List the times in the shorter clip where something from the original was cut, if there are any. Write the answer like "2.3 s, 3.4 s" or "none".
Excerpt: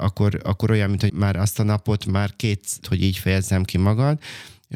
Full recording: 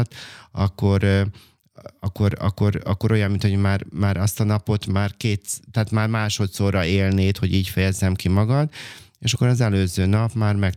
1.1 s, 2.8 s